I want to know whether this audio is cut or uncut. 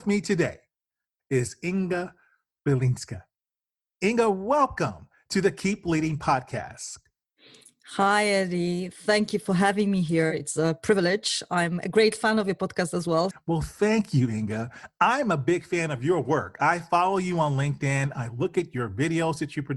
cut